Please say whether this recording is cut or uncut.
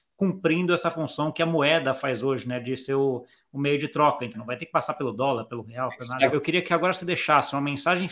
cut